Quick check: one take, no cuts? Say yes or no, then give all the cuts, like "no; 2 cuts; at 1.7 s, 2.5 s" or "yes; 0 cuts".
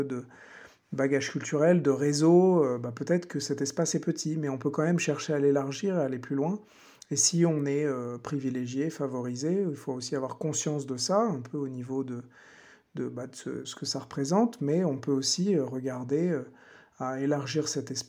no; 1 cut; at 13.6 s